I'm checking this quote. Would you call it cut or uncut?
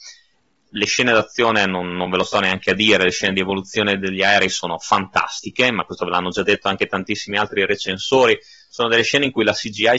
uncut